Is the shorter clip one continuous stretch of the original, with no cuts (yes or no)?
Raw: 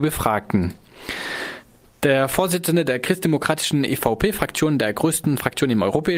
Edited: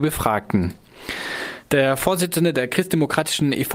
no